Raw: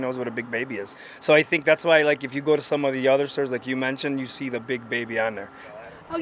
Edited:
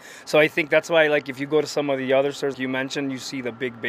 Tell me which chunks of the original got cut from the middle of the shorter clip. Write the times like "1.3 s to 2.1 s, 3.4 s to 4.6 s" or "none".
3.5 s to 3.6 s